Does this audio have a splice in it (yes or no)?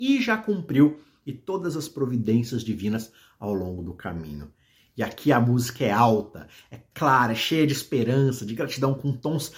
no